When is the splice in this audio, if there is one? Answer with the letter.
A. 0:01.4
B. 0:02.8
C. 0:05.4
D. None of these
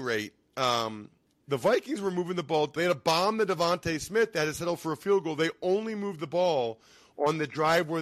B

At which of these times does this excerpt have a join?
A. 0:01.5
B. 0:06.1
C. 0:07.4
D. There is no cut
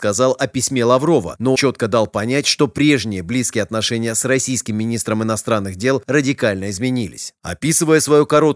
A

